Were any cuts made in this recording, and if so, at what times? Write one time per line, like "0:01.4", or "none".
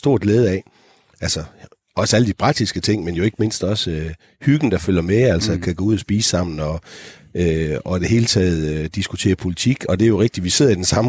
none